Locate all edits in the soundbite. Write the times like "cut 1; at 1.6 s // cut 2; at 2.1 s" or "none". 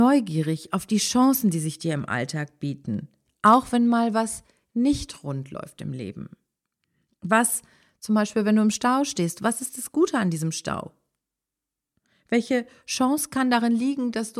none